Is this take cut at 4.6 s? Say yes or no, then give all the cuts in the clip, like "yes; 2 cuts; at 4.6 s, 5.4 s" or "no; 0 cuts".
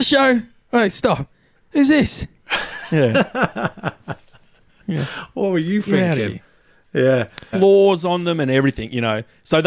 no; 1 cut; at 7.5 s